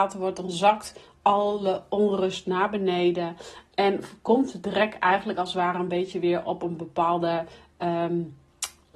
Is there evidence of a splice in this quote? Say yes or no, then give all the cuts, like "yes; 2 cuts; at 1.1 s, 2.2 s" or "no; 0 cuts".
no; 0 cuts